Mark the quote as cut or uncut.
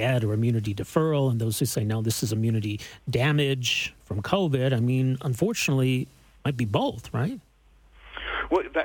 uncut